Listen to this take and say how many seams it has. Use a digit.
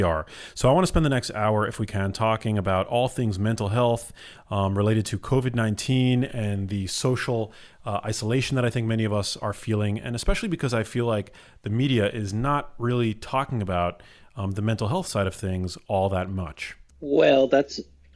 0